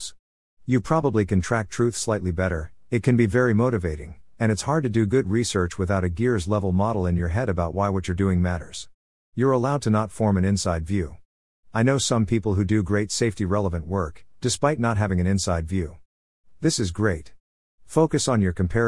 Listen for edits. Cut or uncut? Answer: cut